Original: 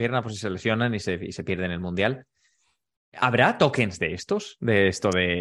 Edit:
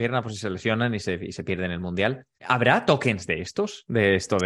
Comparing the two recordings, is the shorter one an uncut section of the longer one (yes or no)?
no